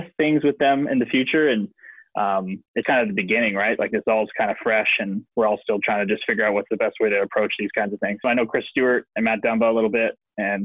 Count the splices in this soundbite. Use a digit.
2